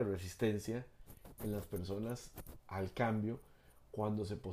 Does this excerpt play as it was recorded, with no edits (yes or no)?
no